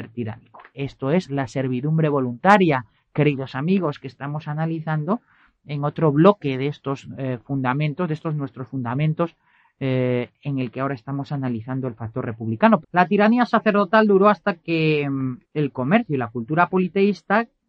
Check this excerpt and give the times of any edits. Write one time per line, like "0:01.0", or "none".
0:12.8
0:15.4